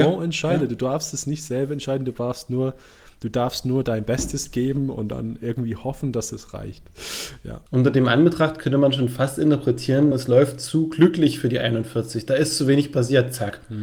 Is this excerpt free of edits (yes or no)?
no